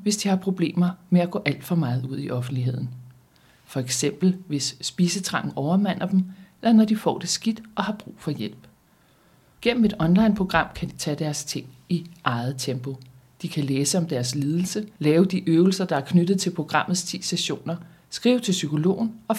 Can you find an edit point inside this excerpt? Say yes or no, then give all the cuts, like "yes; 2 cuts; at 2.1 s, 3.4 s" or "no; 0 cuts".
no; 0 cuts